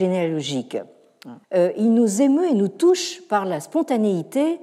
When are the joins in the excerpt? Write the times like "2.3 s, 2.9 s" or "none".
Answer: 1.4 s